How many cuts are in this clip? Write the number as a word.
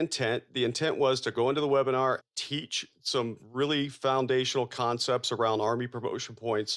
one